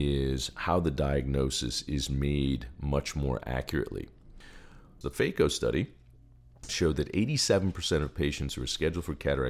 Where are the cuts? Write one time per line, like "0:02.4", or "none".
0:05.0
0:06.7